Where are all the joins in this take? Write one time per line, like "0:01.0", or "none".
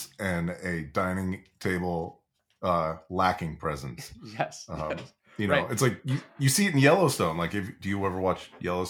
none